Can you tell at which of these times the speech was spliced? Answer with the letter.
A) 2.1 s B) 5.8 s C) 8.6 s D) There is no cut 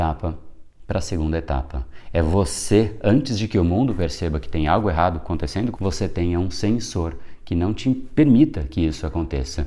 B